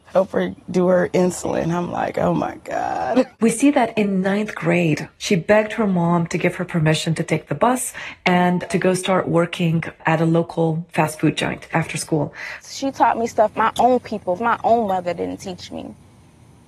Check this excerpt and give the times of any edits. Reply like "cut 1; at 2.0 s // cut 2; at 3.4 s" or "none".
cut 1; at 3.3 s // cut 2; at 12.6 s // cut 3; at 14.4 s